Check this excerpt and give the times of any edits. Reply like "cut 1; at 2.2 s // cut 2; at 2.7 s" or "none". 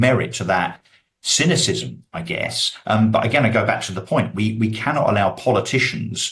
none

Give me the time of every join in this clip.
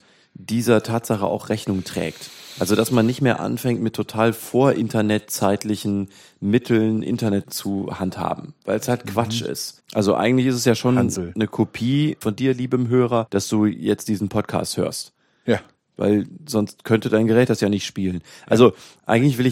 cut 1; at 9.8 s

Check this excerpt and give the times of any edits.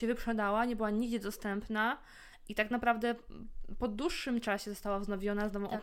none

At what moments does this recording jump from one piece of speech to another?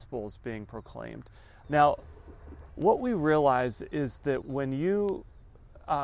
cut 1; at 1.6 s // cut 2; at 2.7 s // cut 3; at 4.4 s

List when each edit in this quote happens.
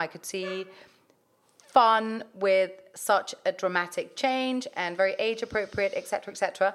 none

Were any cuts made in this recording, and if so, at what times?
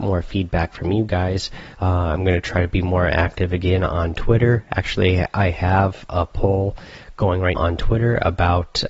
cut 1; at 1.7 s // cut 2; at 7.6 s

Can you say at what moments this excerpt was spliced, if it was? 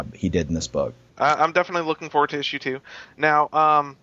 cut 1; at 1.1 s

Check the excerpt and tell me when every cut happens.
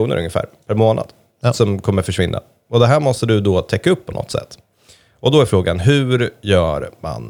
none

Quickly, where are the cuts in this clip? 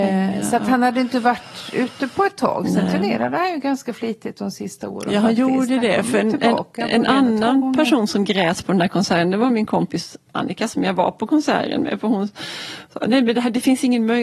none

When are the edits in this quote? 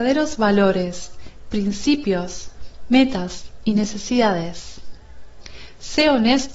none

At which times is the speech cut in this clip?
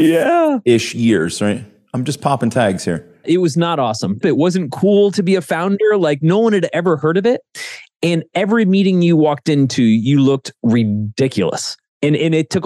cut 1; at 4.2 s

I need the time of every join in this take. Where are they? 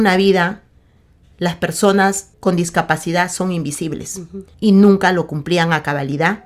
cut 1; at 2.3 s // cut 2; at 4.5 s

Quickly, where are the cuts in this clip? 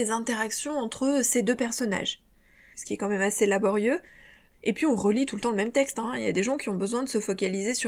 cut 1; at 2.7 s // cut 2; at 4.5 s // cut 3; at 6.0 s

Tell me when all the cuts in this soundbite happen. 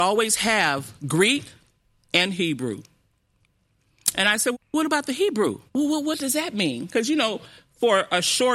cut 1; at 4.5 s // cut 2; at 5.7 s

